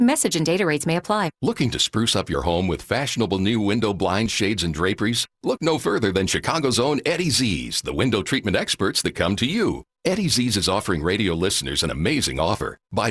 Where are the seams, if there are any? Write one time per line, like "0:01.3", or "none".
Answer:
none